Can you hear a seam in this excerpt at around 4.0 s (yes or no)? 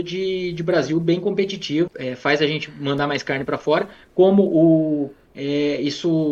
no